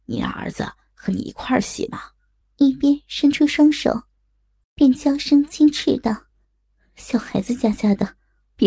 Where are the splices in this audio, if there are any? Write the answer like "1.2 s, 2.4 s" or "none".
2.4 s, 4.6 s, 6.3 s